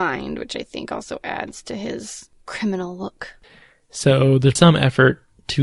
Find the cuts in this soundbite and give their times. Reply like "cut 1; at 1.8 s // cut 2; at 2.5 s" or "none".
cut 1; at 3.4 s // cut 2; at 4.6 s